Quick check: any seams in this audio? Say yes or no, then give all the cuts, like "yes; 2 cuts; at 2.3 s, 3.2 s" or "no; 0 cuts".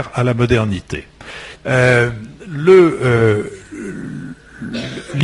yes; 1 cut; at 1.6 s